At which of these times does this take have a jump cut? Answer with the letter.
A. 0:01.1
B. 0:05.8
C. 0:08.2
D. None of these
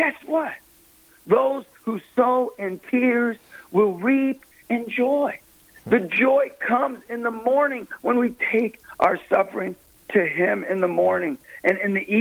A